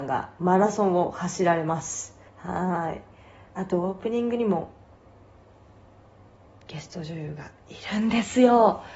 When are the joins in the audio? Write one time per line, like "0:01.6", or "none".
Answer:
0:02.3